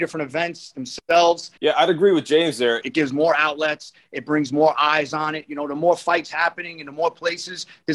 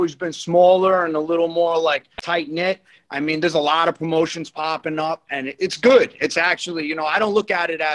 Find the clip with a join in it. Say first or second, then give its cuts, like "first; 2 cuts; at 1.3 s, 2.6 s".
first; 2 cuts; at 1.6 s, 2.8 s